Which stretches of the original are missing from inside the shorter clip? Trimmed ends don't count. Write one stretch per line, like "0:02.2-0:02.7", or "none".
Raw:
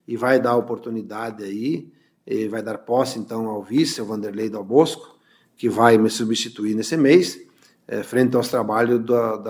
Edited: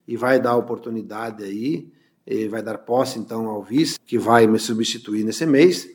0:04.0-0:05.5